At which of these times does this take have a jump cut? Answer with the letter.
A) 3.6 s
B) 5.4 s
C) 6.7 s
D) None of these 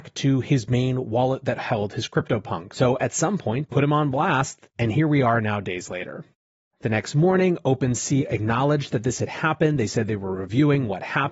A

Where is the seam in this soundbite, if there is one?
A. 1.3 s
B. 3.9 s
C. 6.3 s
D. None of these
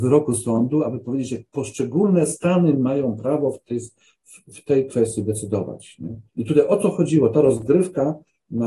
C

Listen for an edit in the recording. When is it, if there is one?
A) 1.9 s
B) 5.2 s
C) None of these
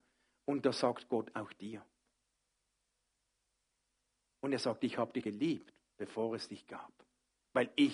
B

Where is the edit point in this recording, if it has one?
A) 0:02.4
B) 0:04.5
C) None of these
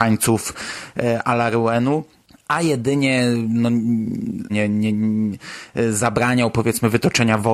B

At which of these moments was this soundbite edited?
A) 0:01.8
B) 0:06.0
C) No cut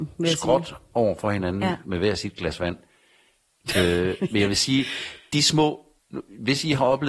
B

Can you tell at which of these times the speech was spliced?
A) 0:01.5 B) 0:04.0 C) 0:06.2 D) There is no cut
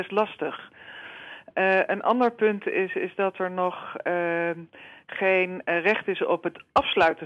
D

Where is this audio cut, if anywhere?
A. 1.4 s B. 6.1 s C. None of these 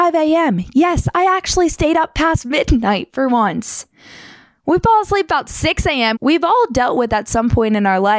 B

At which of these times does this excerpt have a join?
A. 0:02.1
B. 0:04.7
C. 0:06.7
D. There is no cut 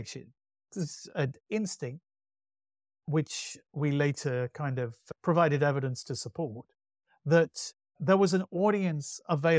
D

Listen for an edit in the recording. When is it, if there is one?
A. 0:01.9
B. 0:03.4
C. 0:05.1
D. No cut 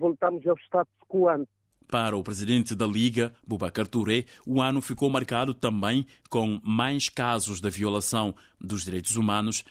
D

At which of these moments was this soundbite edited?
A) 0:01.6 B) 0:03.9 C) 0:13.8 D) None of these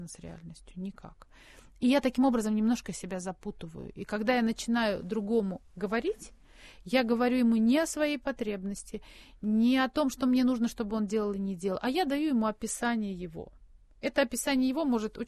D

